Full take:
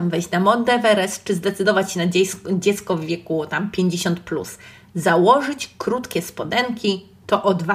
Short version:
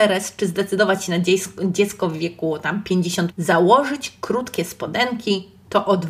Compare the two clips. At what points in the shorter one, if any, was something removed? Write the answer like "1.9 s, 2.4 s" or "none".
3.3 s